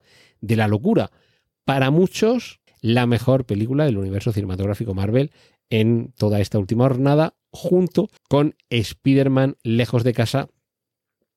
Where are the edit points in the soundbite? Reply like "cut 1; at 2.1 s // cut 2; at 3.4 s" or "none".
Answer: cut 1; at 2.7 s // cut 2; at 8.2 s